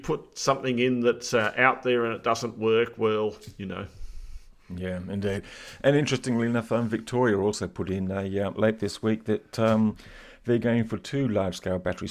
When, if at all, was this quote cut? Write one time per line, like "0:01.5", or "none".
0:08.5